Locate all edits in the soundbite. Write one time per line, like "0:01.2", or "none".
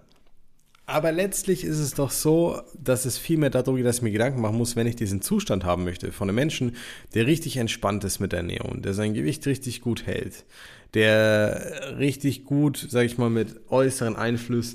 none